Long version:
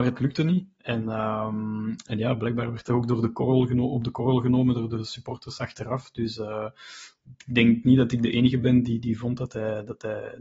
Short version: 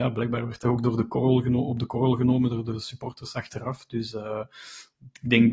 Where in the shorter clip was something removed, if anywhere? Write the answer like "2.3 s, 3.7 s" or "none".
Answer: none